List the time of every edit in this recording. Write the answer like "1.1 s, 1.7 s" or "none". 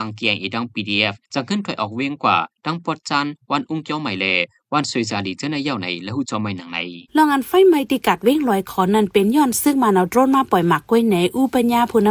1.2 s, 7.1 s